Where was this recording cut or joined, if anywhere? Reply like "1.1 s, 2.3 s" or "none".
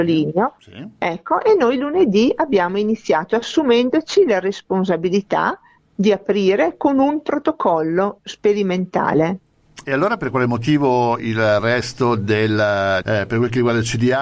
9.8 s, 13.0 s